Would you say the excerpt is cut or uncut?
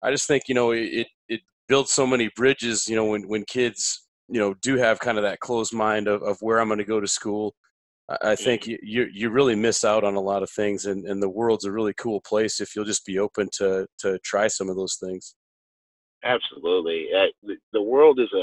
cut